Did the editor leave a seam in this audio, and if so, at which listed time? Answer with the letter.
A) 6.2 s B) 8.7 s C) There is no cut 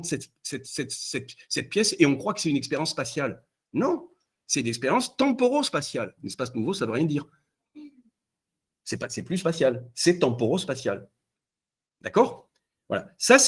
A